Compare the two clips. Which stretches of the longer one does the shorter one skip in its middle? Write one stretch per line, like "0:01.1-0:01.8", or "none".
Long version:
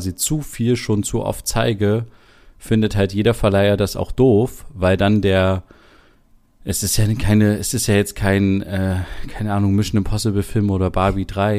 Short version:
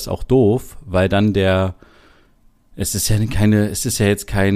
none